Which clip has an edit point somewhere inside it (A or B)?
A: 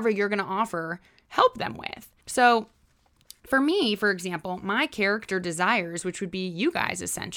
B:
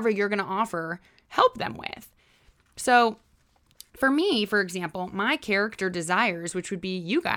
A